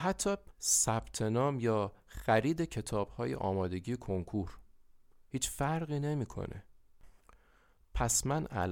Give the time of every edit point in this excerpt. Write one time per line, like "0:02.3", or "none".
none